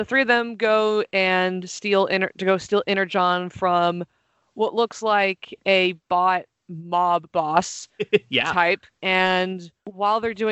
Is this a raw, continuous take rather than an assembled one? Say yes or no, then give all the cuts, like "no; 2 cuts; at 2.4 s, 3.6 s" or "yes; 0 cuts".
yes; 0 cuts